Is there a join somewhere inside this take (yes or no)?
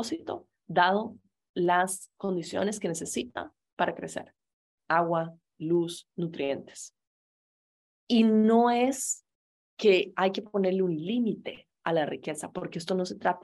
yes